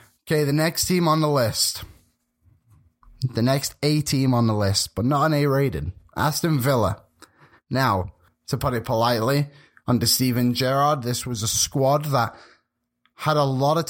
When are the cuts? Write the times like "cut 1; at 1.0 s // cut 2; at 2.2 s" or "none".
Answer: cut 1; at 8.3 s